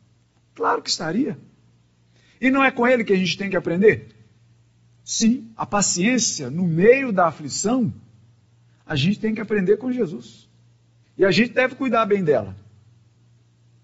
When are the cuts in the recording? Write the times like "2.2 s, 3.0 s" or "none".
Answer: 5.5 s, 11.0 s